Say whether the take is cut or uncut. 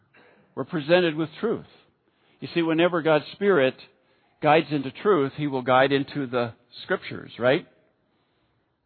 uncut